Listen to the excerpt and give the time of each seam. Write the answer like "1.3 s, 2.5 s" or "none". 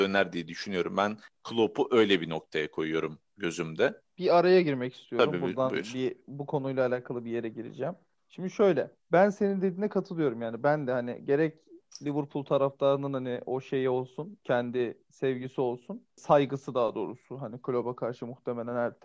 9.0 s